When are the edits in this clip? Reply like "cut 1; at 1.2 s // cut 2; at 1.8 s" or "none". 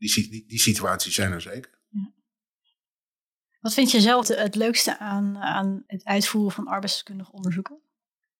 cut 1; at 4.2 s // cut 2; at 5.9 s